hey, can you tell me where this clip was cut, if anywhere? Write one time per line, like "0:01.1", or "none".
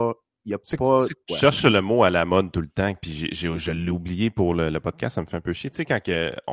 0:01.3